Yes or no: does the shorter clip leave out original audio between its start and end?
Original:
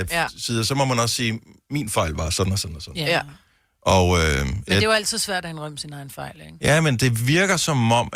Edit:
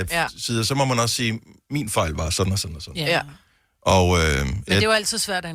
no